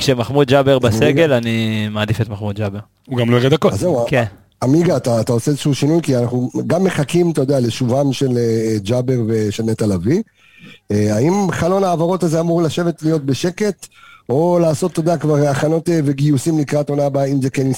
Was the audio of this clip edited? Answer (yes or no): no